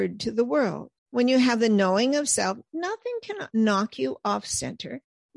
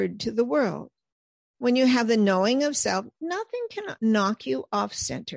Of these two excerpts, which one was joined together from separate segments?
first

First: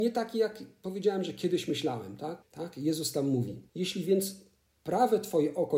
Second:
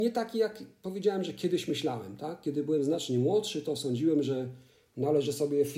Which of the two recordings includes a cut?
first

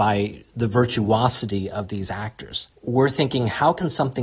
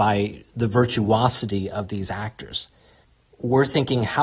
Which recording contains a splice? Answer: first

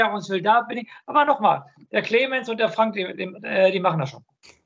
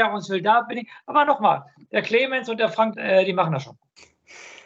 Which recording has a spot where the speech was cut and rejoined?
second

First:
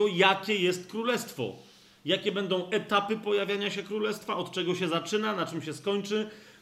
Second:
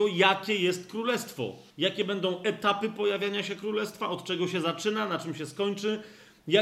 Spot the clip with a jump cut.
second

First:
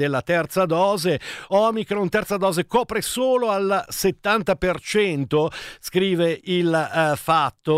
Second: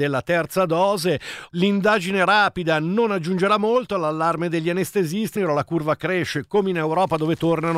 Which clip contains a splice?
second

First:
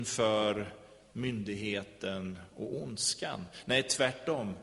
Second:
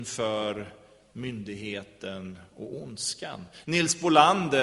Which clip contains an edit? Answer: second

